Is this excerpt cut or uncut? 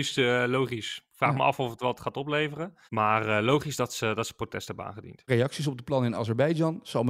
cut